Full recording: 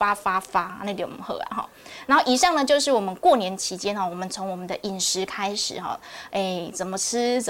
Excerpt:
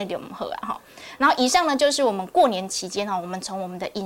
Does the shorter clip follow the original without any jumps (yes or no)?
yes